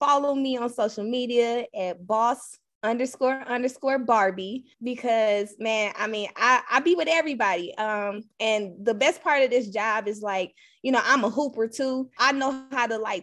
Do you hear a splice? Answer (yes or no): yes